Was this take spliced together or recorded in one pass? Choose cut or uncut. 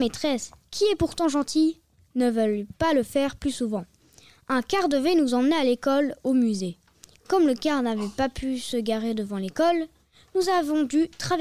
uncut